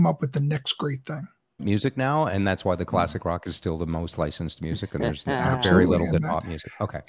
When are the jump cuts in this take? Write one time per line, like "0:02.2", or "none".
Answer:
0:01.6